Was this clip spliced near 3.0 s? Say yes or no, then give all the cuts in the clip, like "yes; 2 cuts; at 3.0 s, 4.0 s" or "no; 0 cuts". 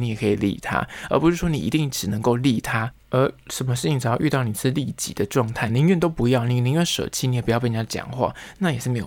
no; 1 cut; at 5.7 s